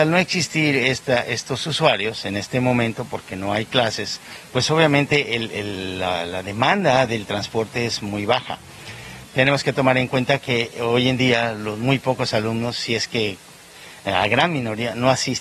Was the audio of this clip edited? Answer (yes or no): yes